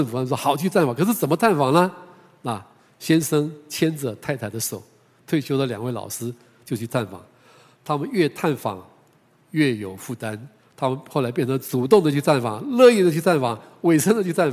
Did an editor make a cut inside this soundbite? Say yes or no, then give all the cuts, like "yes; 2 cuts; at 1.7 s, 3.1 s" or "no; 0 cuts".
no; 0 cuts